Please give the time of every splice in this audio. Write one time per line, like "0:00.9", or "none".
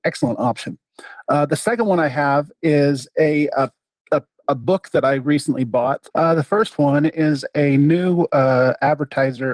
0:06.1